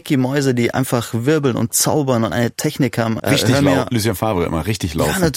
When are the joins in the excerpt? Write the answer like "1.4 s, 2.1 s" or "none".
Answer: 3.2 s